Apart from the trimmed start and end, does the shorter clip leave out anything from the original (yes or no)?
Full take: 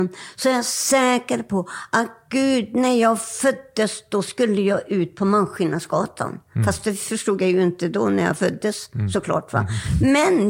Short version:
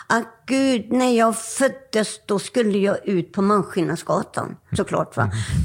yes